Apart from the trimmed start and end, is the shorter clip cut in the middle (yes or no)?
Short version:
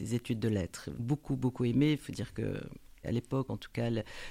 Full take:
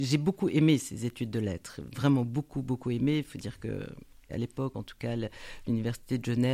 yes